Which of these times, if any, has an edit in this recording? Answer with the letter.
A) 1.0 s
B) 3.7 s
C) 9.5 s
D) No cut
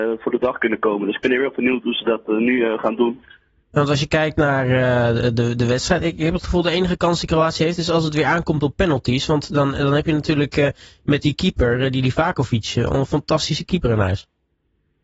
D